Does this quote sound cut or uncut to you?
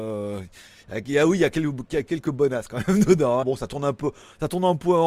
cut